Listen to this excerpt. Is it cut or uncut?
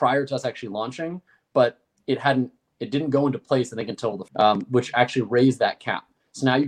cut